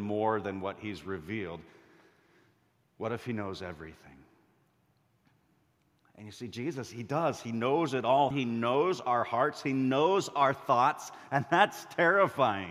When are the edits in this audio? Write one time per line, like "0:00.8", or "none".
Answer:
0:08.3